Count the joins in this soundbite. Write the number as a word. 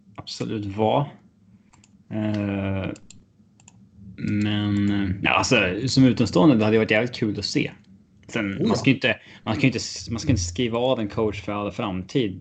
zero